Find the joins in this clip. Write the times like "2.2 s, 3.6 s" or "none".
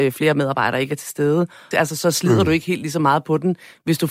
1.7 s